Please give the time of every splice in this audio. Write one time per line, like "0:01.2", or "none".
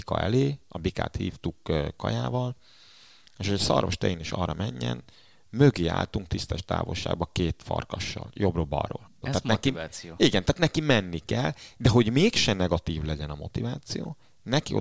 0:09.2

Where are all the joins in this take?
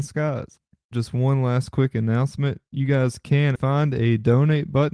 0:00.9
0:03.6

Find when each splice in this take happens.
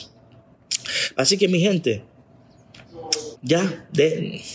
0:01.1
0:03.4

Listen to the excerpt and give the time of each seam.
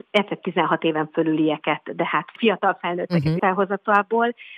0:03.4

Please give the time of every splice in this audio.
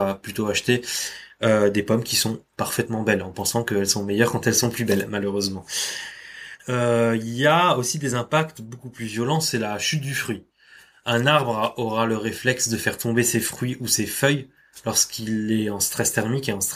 0:06.6

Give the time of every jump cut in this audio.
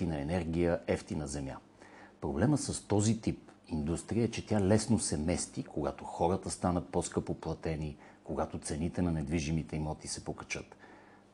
0:05.6

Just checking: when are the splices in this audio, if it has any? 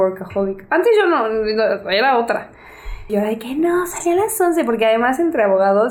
0:03.1

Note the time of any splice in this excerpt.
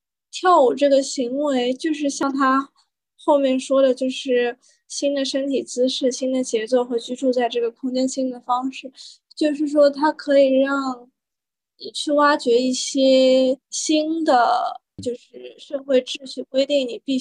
0:13.6
0:15.0

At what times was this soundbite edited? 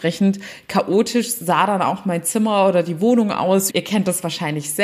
0:03.7

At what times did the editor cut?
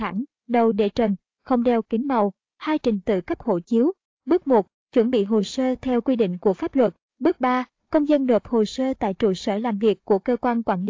0:07.0

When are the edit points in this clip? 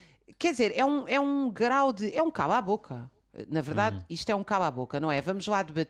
0:02.1

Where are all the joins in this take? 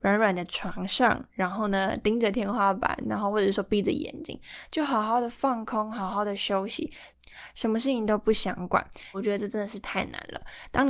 0:09.1

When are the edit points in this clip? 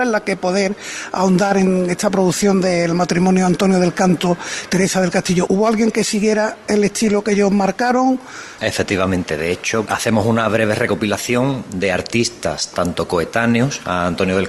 0:05.5
0:08.6
0:09.9

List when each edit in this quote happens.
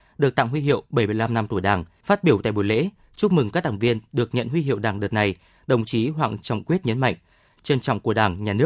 0:02.0
0:07.5

